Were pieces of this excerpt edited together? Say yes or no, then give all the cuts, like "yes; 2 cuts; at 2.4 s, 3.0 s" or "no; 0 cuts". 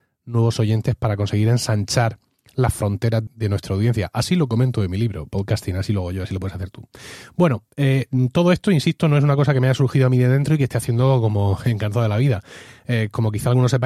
yes; 1 cut; at 3.3 s